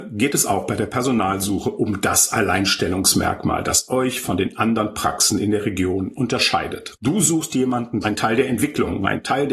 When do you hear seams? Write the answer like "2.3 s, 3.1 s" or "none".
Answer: 7.0 s, 8.0 s